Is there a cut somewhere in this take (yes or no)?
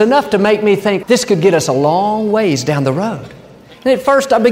yes